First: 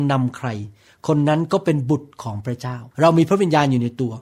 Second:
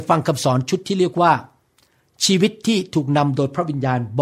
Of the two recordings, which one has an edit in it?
first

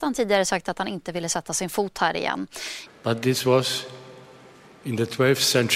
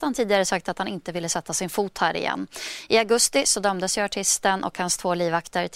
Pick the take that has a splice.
first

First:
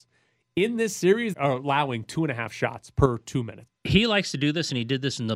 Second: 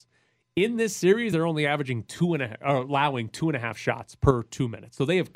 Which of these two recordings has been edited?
first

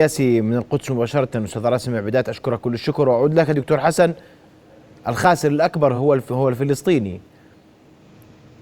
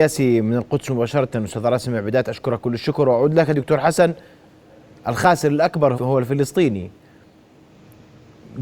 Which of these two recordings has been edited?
second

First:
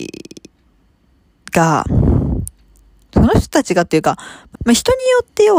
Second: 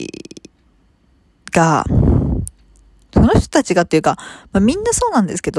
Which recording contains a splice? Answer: first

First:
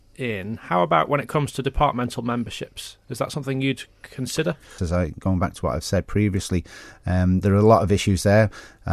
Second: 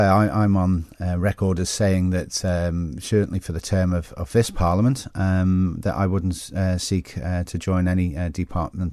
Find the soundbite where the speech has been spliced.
first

